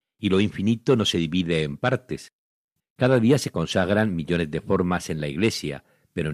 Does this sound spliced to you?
yes; 1 cut; at 2.8 s

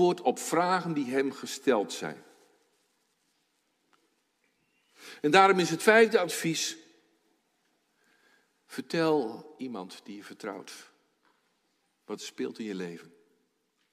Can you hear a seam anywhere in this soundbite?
no; 0 cuts

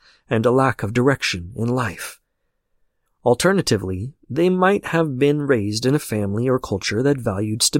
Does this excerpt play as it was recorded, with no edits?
no; 1 cut; at 3.1 s

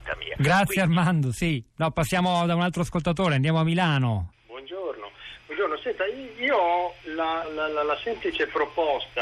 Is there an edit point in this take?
yes; 3 cuts; at 1.7 s, 4.3 s, 7.4 s

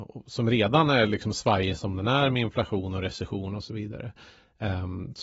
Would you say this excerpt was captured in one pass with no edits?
yes; 0 cuts

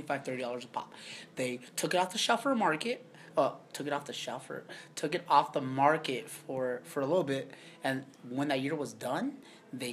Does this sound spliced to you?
no; 0 cuts

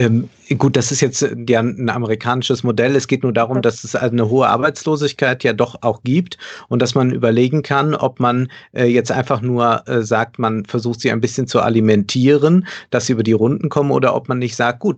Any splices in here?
no; 0 cuts

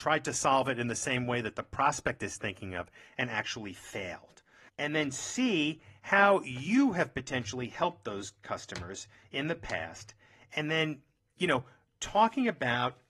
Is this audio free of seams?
no; 1 cut; at 4.7 s

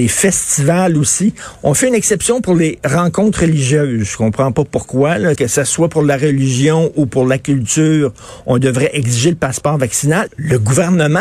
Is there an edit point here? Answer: yes; 2 cuts; at 5.4 s, 10.3 s

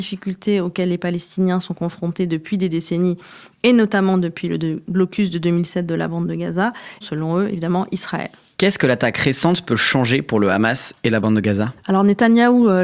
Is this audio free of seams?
no; 1 cut; at 7.0 s

